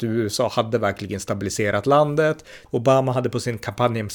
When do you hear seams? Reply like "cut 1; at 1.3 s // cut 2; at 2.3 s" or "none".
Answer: cut 1; at 2.6 s